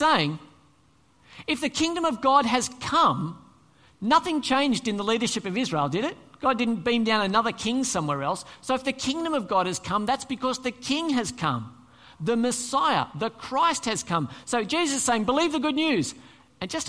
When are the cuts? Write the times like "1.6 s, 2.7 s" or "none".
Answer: none